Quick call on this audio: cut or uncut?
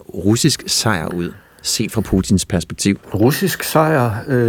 cut